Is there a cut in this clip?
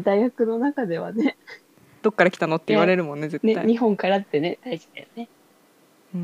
yes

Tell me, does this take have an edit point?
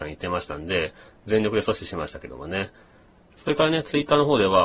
yes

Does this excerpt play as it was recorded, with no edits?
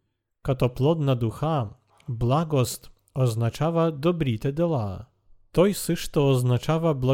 yes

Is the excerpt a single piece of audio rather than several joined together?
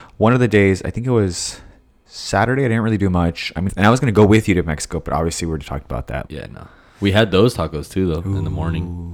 no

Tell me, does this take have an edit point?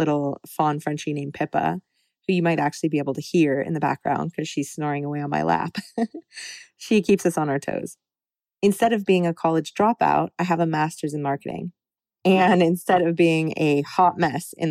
no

